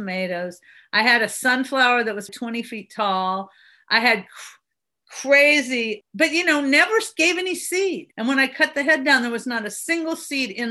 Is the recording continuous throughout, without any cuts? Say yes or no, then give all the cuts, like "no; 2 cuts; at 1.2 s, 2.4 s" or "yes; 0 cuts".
no; 3 cuts; at 2.3 s, 6.0 s, 8.1 s